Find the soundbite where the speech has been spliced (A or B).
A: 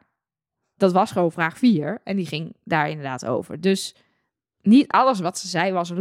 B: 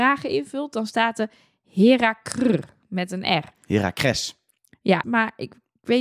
B